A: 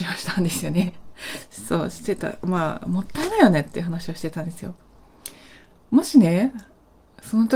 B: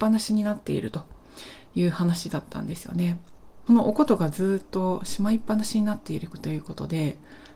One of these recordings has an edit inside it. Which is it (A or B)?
B